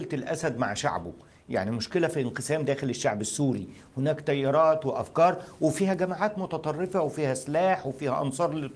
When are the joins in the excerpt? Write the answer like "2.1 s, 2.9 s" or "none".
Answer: none